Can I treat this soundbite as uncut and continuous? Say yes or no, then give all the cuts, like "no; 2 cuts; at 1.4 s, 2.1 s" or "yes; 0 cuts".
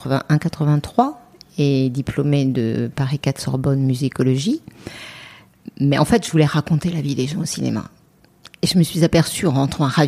yes; 0 cuts